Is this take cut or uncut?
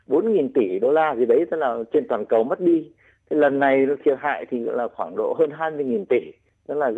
uncut